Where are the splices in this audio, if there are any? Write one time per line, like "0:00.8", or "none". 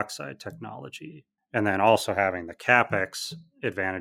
0:01.4